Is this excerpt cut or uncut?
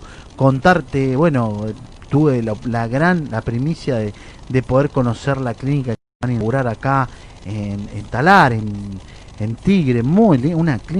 uncut